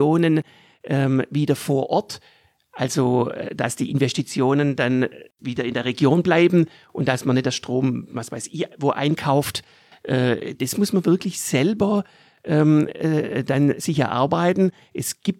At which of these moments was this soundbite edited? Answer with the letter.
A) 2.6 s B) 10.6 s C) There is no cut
B